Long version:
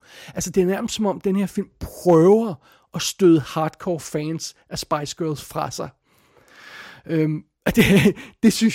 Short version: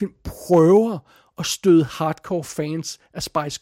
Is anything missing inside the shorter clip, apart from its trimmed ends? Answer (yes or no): no